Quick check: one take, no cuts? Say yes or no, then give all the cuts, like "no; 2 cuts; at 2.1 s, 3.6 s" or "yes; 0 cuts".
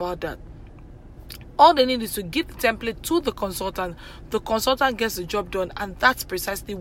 yes; 0 cuts